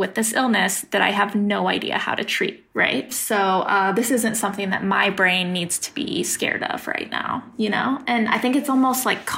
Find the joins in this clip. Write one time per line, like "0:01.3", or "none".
0:03.1